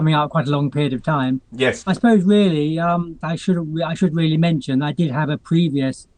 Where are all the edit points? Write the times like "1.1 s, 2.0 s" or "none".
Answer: 1.8 s, 3.2 s

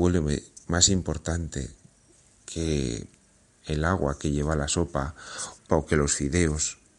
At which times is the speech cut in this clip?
5.7 s

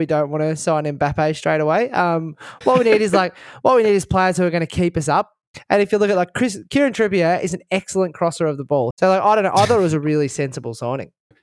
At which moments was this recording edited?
8.9 s

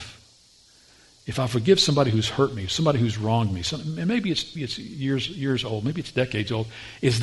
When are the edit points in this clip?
4.6 s

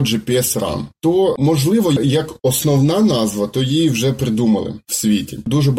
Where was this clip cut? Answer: none

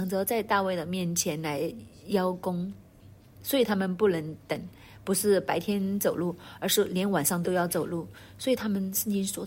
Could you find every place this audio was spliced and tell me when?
7.4 s

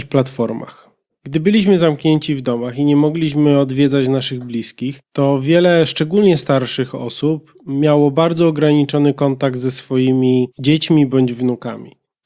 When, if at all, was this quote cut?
none

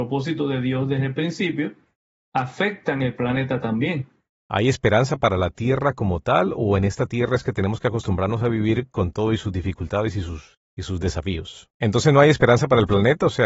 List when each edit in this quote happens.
4.4 s, 11.7 s

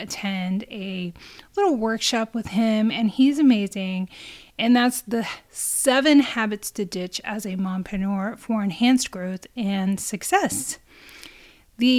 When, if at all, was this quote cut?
4.5 s

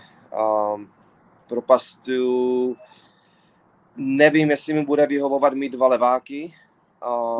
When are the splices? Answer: none

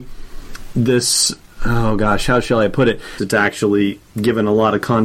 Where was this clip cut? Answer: 3.2 s

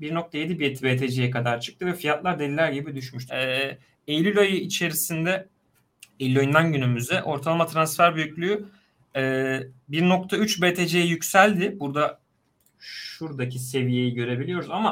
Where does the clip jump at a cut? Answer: 3.3 s

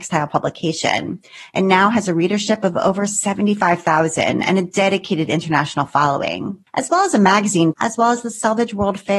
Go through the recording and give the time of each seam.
6.7 s, 7.7 s

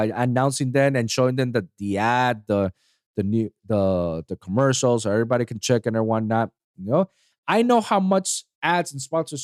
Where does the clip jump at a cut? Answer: 6.7 s

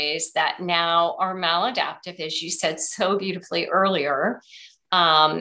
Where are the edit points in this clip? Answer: none

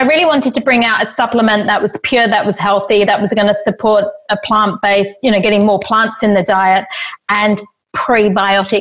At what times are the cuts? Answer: 3.1 s

